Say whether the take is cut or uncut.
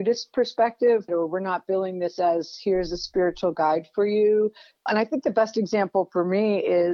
cut